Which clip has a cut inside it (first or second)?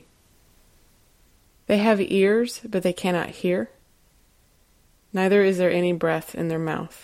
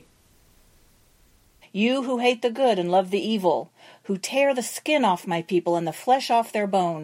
second